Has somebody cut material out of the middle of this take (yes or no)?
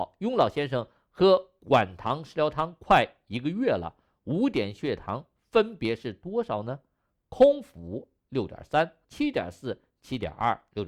yes